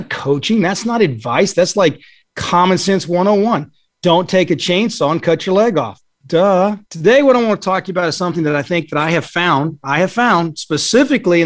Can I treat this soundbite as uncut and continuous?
no; 1 cut; at 6.8 s

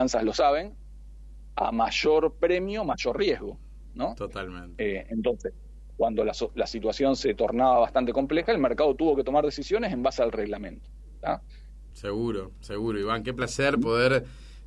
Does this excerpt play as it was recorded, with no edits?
no; 2 cuts; at 5.9 s, 11.9 s

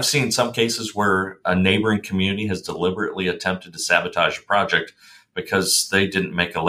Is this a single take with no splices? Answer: yes; 0 cuts

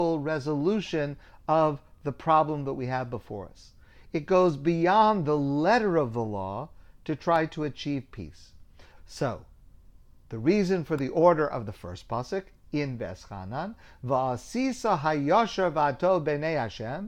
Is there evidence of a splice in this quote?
yes; 1 cut; at 8.9 s

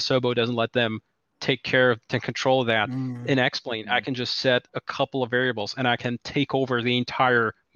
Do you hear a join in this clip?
no; 0 cuts

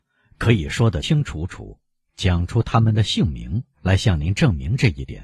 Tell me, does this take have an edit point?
yes; 2 cuts; at 1.0 s, 3.7 s

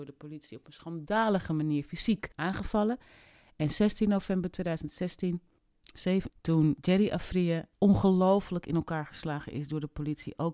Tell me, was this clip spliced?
yes; 3 cuts; at 2.3 s, 6.3 s, 7.7 s

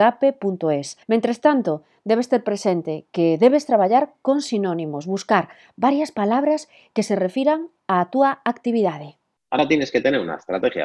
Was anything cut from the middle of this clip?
yes; 1 cut; at 1.0 s

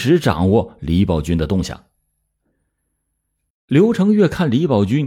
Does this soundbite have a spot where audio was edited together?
yes; 1 cut; at 3.5 s

